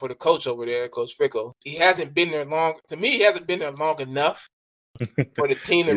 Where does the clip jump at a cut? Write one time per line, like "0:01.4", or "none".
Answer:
0:01.5